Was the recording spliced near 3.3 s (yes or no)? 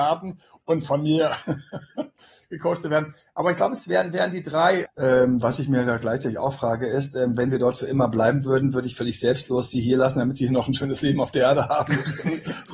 no